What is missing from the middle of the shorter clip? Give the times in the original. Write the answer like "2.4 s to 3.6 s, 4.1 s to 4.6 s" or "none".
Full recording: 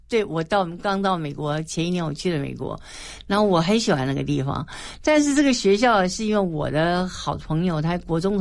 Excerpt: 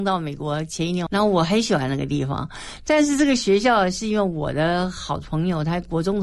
2.0 s to 3.2 s